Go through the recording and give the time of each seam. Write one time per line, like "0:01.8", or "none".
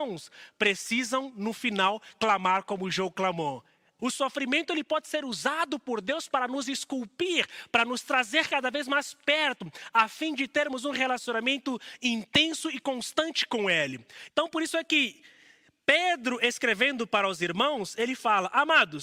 0:04.0
0:14.3